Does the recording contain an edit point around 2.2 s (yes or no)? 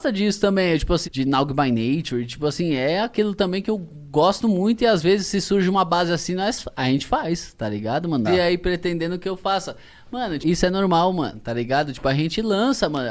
no